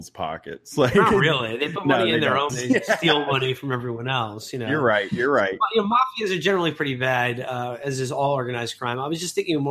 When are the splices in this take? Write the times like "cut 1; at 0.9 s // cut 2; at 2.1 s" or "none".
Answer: cut 1; at 2.5 s